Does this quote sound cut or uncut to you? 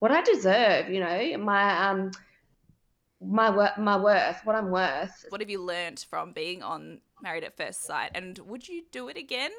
cut